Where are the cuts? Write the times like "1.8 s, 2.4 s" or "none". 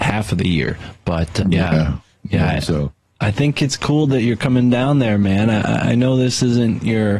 none